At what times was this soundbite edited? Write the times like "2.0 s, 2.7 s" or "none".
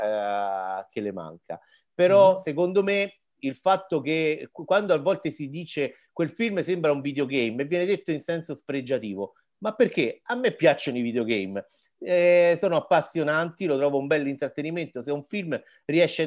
none

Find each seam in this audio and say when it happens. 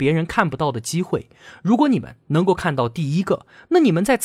none

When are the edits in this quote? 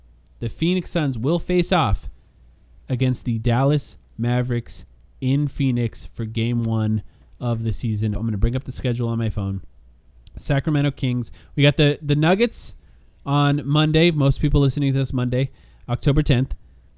8.1 s

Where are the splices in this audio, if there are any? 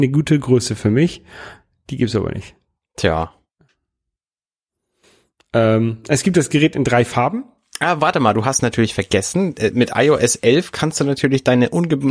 none

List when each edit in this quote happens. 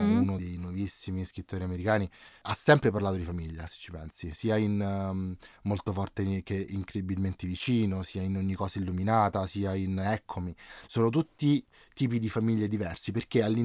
none

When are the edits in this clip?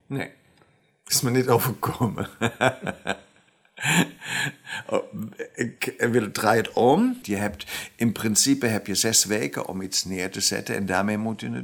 7.2 s

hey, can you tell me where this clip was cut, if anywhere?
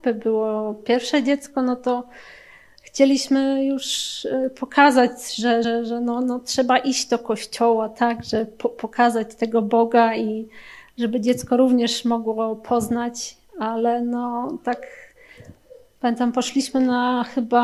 none

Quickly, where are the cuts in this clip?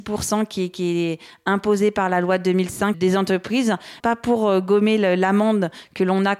2.9 s, 4.0 s

